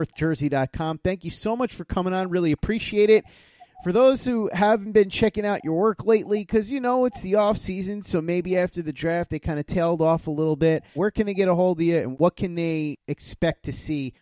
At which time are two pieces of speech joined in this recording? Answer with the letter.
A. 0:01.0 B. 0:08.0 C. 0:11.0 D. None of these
C